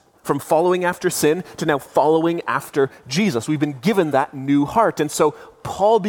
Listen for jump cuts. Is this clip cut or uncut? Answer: uncut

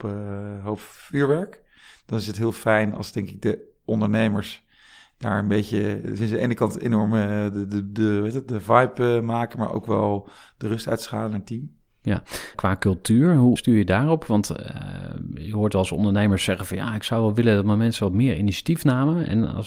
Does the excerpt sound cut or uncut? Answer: cut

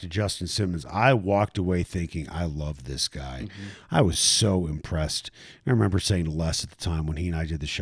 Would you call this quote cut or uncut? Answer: uncut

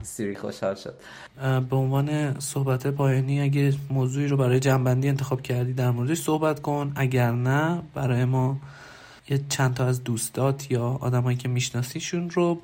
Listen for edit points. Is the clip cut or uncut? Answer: cut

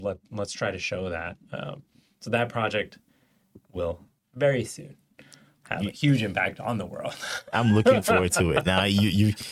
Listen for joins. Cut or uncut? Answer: uncut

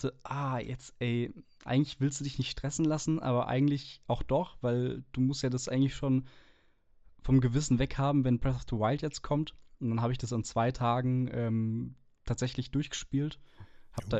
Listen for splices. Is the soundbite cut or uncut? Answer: uncut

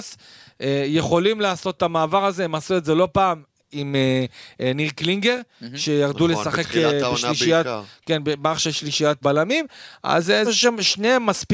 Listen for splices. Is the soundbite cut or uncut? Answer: cut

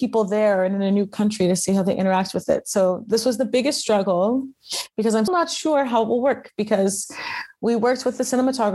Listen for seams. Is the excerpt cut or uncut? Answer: cut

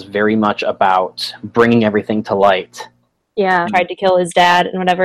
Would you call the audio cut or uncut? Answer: cut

